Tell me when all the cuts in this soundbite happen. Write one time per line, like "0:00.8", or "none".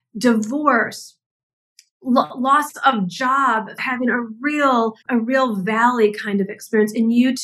0:03.8
0:05.0